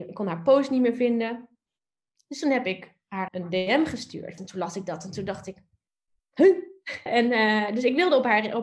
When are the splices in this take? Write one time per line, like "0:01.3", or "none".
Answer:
0:03.3
0:04.4
0:07.1